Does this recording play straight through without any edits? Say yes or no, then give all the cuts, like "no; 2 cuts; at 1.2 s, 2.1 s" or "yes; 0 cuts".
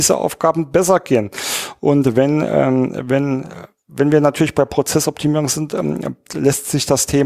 yes; 0 cuts